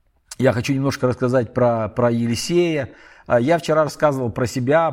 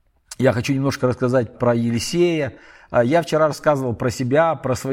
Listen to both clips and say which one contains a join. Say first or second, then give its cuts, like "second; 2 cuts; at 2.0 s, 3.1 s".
second; 1 cut; at 1.5 s